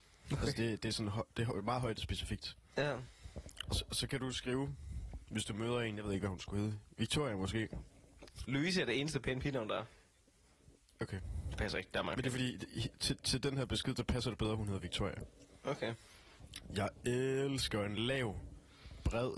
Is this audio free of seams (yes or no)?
no